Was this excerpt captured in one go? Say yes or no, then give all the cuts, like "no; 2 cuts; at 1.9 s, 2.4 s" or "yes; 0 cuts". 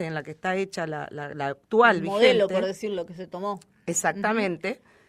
yes; 0 cuts